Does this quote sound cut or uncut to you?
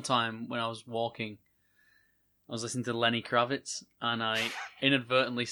uncut